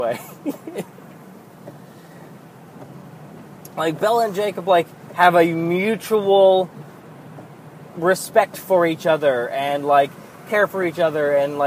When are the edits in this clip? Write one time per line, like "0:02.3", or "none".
none